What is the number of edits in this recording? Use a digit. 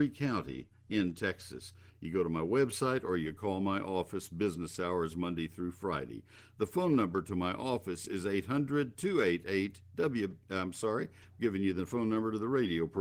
1